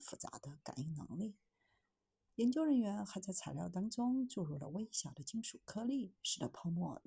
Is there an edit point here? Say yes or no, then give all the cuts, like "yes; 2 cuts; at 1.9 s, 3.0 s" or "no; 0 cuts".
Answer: yes; 1 cut; at 2.3 s